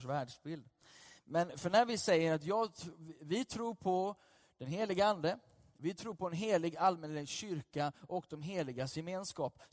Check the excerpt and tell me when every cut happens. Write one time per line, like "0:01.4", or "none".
none